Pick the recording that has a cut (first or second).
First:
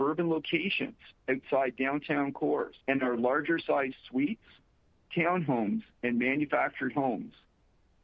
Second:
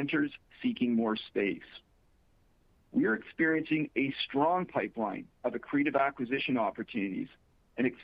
first